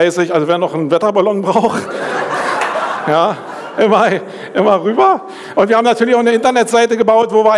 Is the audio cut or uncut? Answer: uncut